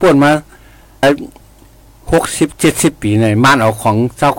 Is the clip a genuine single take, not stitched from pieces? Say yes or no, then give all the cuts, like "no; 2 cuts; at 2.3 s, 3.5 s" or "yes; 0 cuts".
no; 1 cut; at 1.0 s